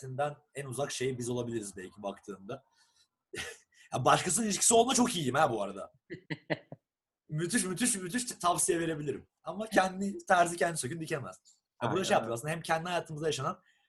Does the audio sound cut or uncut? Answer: uncut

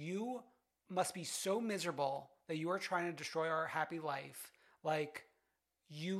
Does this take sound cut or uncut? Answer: uncut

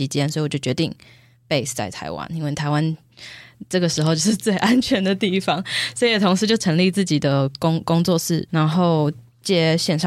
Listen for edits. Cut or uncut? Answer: cut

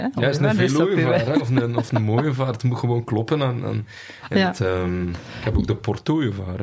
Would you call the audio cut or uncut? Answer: uncut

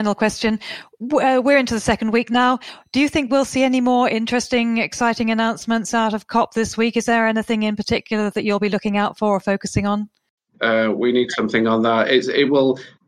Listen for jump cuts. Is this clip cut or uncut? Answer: cut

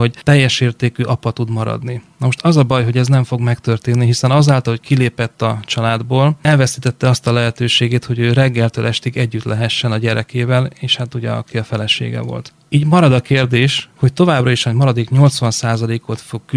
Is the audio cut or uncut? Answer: uncut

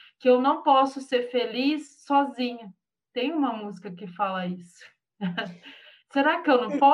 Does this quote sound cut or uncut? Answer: uncut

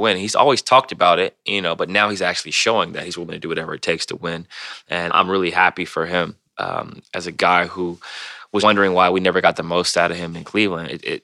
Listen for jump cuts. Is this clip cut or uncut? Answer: cut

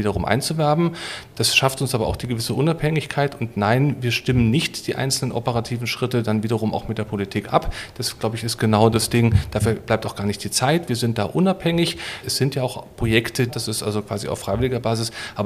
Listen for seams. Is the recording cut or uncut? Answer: cut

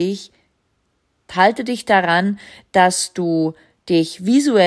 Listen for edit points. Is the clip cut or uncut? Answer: cut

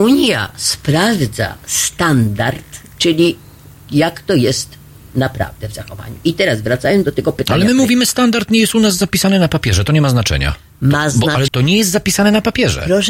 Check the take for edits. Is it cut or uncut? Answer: cut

